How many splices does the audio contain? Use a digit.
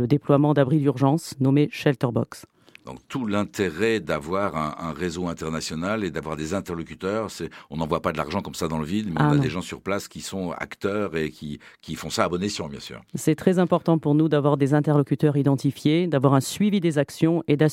0